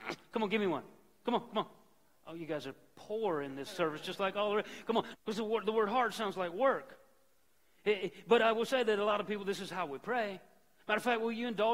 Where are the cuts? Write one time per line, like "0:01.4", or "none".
0:05.1